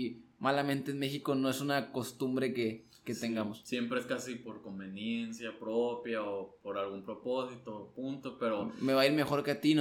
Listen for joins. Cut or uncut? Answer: uncut